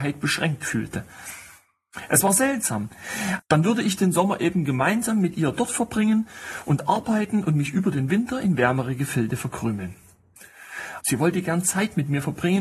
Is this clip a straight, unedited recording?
no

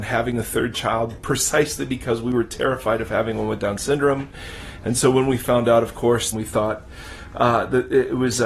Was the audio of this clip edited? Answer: yes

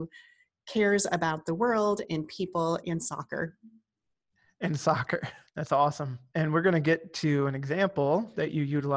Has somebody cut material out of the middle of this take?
yes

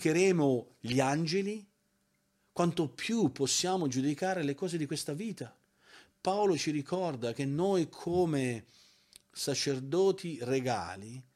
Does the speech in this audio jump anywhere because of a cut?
no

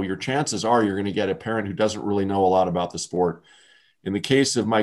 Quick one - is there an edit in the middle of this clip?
no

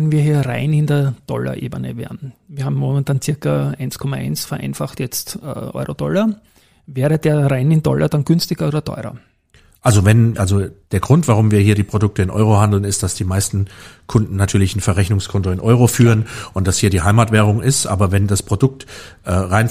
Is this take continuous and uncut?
no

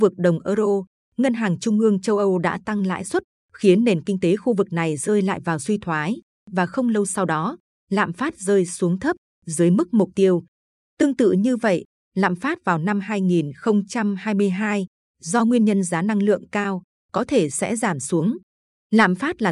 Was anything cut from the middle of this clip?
no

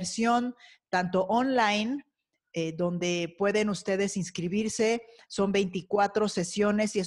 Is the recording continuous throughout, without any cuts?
yes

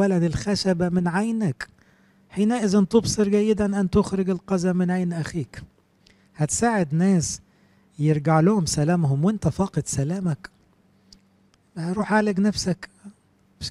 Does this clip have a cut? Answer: no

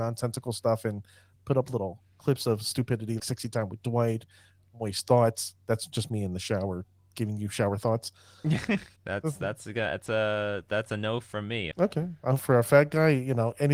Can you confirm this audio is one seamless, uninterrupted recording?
no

